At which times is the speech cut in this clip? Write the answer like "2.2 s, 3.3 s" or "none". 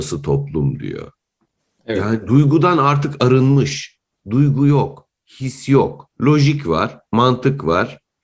6.1 s